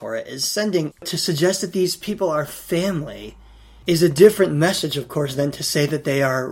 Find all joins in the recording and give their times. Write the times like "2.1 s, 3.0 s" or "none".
0.9 s